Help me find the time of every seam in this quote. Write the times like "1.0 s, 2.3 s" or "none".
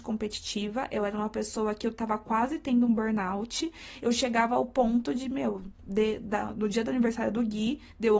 none